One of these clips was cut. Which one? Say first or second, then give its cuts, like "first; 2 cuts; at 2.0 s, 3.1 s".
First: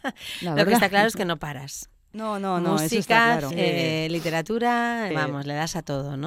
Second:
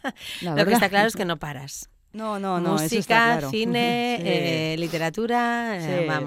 first; 2 cuts; at 3.5 s, 5.1 s